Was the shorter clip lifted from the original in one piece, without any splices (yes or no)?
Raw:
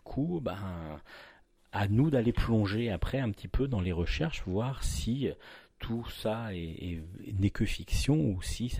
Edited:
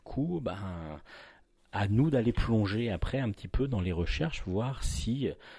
yes